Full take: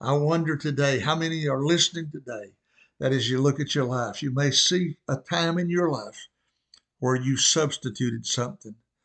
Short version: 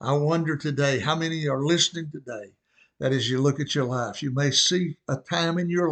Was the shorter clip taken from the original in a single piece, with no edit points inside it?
yes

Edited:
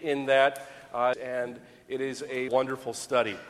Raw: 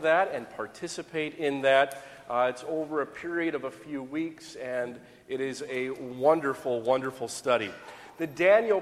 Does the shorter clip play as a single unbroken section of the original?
no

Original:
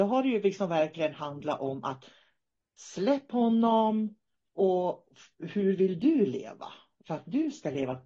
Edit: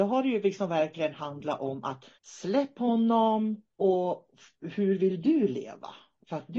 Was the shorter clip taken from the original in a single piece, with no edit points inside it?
no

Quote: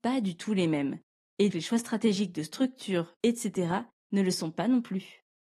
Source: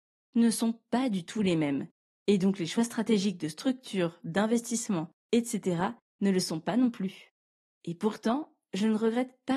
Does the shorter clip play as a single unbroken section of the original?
no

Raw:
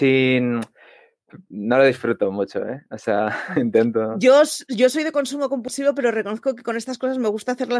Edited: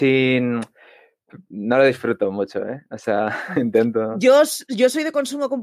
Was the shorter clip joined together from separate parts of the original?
no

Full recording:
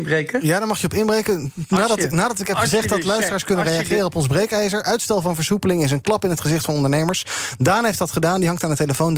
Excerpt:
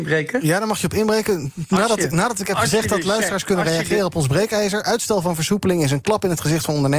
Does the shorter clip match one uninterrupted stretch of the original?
yes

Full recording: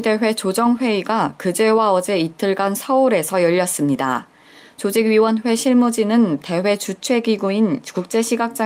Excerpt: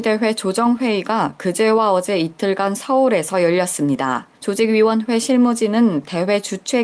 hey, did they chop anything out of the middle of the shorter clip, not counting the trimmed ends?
yes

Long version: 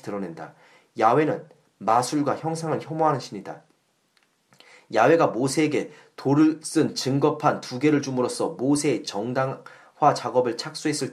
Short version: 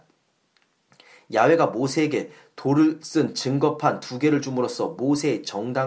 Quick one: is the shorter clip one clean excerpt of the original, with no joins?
yes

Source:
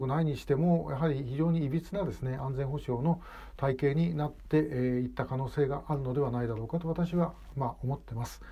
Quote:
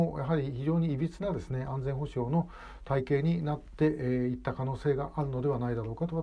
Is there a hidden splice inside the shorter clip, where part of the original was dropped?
no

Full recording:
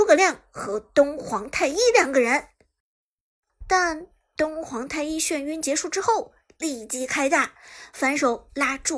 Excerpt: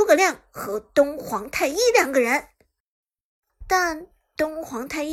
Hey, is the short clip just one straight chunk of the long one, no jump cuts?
yes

